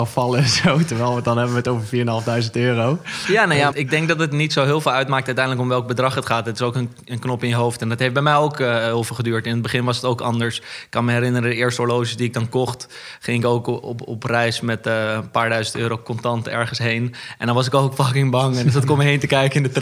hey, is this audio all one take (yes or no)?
no